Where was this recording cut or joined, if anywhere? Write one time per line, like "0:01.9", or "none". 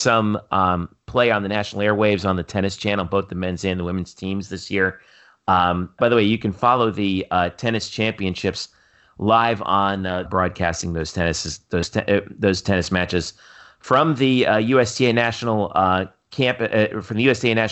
0:06.0
0:10.3

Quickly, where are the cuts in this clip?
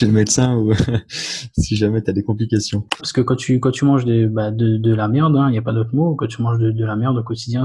0:03.0

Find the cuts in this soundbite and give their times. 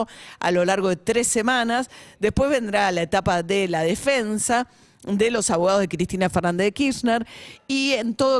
none

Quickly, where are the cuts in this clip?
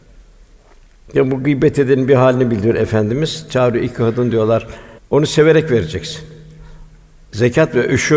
0:05.0

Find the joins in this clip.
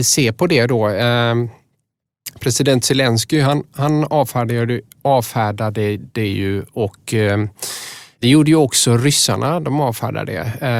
none

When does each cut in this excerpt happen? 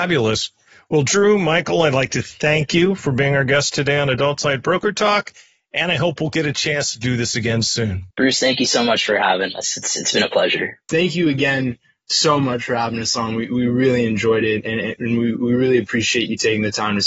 0:08.1
0:10.9

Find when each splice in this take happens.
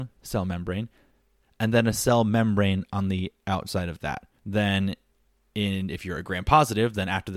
0:01.4
0:04.4

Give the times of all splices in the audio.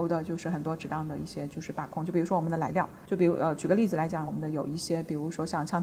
0:03.0
0:04.3

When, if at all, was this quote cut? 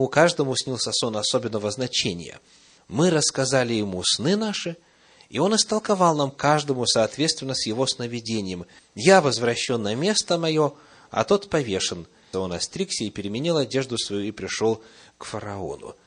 0:02.8
0:08.8
0:12.3

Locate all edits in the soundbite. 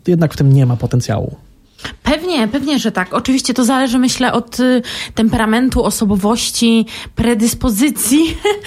none

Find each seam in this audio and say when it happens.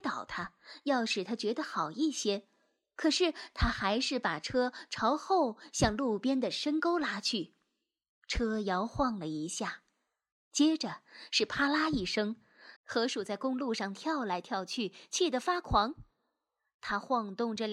0:12.8

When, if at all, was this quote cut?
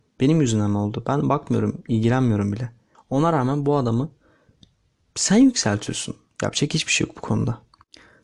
0:02.9

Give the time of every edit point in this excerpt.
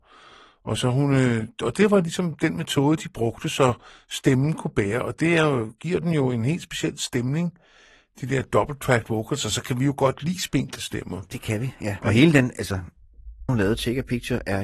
0:12.0
0:13.5

